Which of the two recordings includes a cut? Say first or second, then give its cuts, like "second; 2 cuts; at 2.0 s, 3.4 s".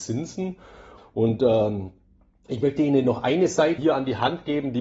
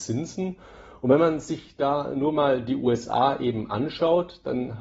first; 2 cuts; at 1.0 s, 3.8 s